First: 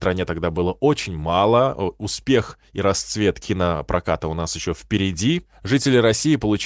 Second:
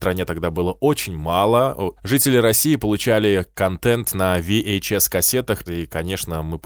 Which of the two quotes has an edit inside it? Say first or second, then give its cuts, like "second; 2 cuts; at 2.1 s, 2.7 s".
second; 2 cuts; at 2.0 s, 5.7 s